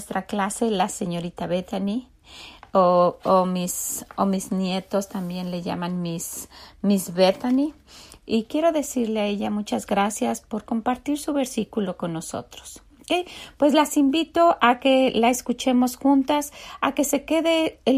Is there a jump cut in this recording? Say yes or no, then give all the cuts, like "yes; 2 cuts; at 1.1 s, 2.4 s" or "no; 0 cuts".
no; 0 cuts